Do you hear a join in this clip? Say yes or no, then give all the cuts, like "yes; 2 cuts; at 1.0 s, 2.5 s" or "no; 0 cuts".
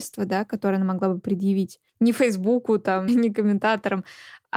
yes; 2 cuts; at 1.9 s, 3.1 s